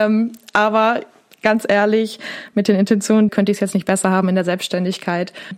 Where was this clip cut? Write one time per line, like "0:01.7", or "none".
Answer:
0:03.3